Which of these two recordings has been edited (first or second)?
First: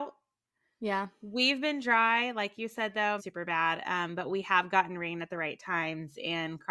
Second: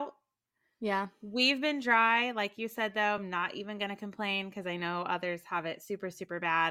first